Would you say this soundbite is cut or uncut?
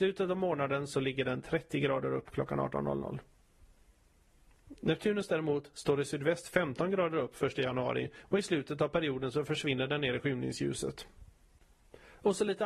uncut